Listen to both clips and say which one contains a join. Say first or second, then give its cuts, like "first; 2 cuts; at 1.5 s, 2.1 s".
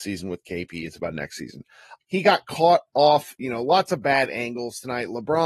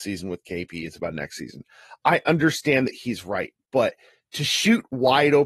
first; 1 cut; at 2.0 s